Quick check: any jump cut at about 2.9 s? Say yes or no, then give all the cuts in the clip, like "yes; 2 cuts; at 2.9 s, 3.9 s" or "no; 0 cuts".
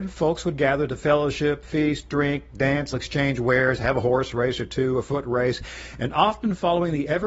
yes; 1 cut; at 2.9 s